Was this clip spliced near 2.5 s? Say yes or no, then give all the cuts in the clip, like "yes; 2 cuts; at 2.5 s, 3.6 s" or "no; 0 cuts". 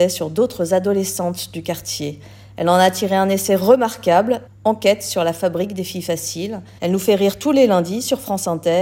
no; 2 cuts; at 4.5 s, 6.8 s